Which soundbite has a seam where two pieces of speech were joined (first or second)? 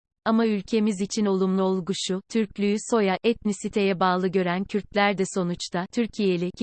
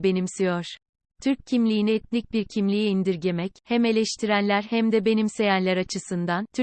second